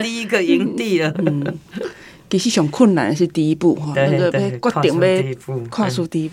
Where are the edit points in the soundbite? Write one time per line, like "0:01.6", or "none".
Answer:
0:01.1